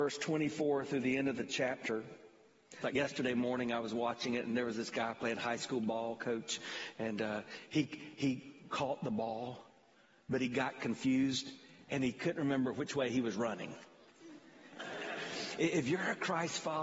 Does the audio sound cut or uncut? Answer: cut